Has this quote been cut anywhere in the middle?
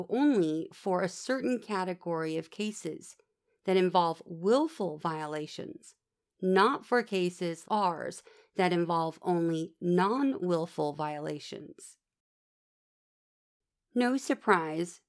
yes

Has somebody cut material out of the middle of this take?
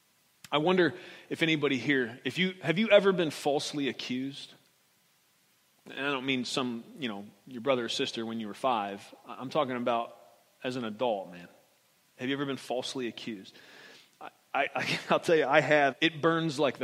yes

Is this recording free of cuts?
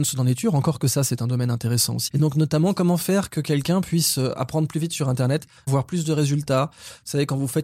no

